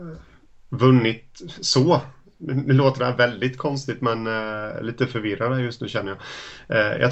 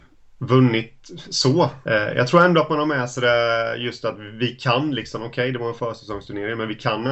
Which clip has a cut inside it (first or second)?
second